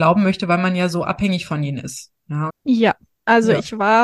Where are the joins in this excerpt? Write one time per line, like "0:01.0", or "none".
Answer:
0:02.5